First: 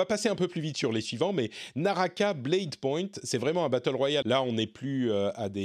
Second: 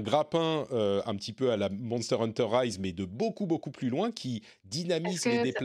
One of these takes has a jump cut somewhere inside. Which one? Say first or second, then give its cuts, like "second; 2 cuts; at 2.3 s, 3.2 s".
first; 1 cut; at 4.2 s